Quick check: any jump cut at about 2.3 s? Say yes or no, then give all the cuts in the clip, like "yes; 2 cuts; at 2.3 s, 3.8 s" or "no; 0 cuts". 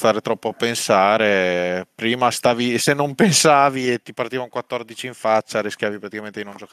yes; 2 cuts; at 2.3 s, 4.0 s